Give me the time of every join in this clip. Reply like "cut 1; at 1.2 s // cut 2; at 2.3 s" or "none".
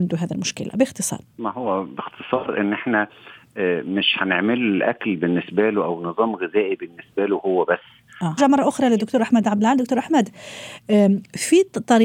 cut 1; at 1.3 s // cut 2; at 8.4 s